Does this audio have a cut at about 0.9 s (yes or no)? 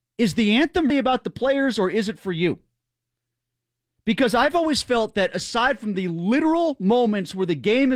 yes